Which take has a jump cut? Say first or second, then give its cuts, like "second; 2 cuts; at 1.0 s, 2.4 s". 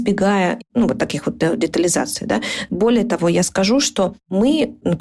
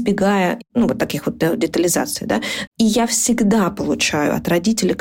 second; 1 cut; at 2.7 s